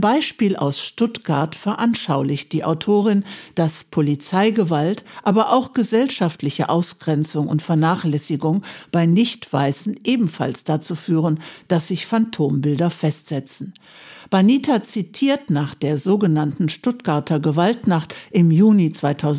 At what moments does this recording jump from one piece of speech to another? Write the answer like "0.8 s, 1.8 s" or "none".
none